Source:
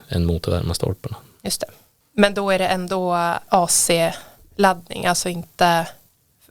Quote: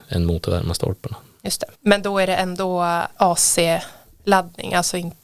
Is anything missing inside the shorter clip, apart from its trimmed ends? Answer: yes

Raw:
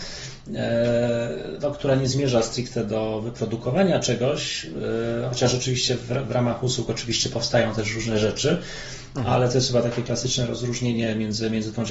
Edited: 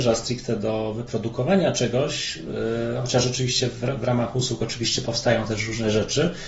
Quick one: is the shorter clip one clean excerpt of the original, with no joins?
yes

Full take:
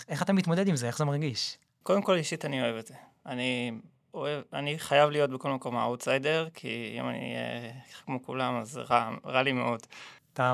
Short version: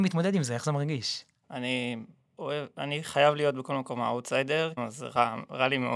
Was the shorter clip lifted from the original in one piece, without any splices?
no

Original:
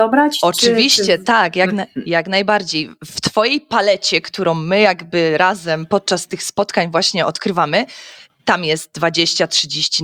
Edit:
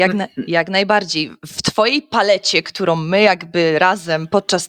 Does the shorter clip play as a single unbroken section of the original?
yes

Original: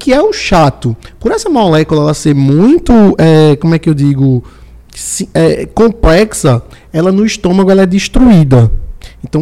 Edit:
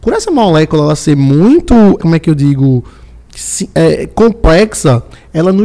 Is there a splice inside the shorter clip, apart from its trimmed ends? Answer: yes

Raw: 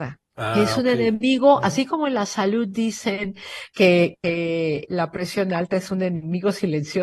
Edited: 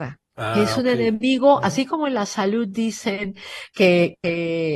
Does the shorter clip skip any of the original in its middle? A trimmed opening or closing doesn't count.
no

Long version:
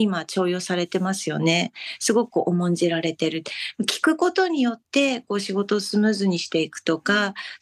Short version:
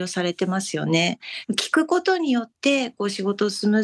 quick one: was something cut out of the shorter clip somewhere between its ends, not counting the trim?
yes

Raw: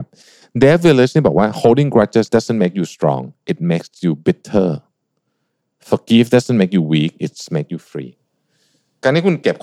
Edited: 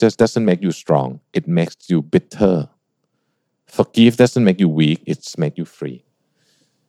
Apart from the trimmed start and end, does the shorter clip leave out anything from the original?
no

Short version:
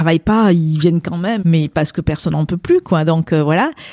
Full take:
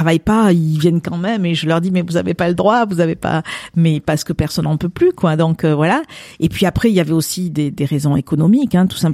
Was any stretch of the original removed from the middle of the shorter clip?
yes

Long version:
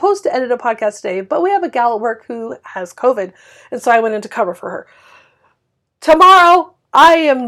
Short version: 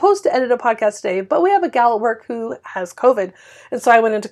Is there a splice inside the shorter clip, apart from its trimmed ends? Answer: no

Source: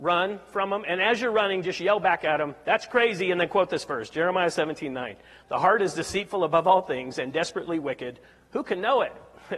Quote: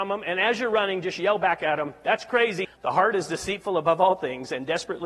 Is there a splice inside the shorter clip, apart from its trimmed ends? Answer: yes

